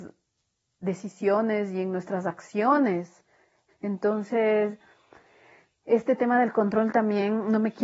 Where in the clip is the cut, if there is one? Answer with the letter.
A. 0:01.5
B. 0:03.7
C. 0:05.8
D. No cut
B